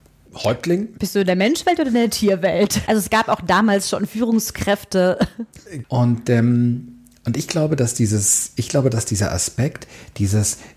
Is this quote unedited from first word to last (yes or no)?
no